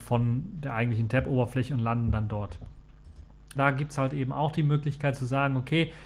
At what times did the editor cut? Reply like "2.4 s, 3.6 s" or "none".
3.5 s